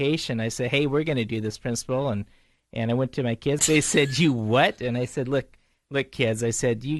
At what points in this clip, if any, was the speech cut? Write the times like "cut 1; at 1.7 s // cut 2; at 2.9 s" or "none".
cut 1; at 3.6 s

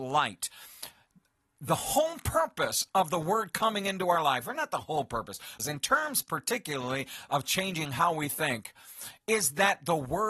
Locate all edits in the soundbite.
cut 1; at 5.6 s

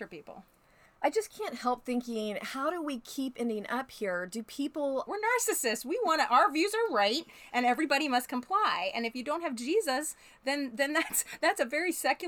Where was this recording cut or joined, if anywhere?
cut 1; at 5.1 s

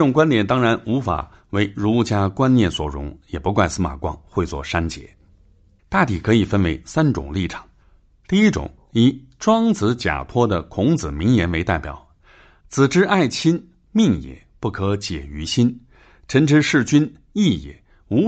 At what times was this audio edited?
cut 1; at 5.8 s

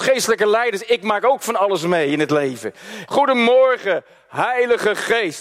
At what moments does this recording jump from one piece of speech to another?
cut 1; at 3.1 s

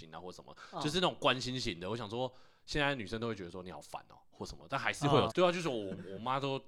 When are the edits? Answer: cut 1; at 5.3 s

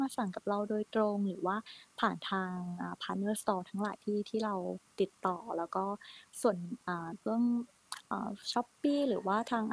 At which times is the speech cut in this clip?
none

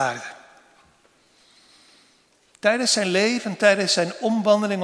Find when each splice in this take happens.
none

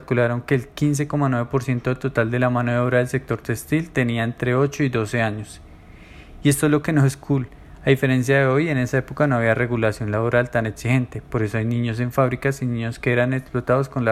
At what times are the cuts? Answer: none

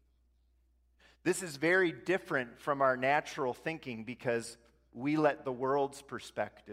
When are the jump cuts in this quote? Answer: none

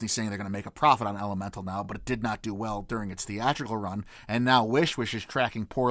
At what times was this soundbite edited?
none

